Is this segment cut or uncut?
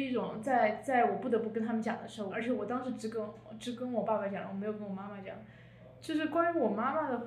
cut